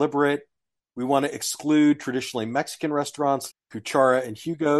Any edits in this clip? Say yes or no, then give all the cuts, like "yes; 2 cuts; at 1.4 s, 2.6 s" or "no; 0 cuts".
yes; 1 cut; at 3.5 s